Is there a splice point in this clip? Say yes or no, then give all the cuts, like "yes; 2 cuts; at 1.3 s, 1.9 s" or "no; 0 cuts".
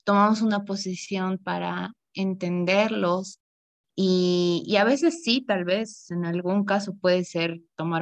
no; 0 cuts